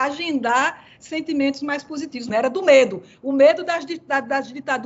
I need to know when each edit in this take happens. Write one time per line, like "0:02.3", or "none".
0:02.3